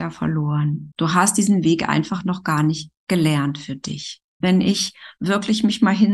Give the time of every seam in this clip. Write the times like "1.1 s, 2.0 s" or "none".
0.9 s, 4.4 s